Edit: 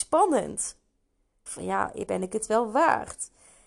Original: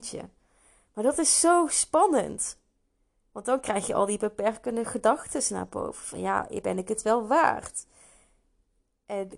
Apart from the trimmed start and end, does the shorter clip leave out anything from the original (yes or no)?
yes